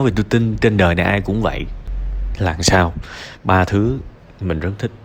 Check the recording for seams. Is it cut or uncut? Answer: cut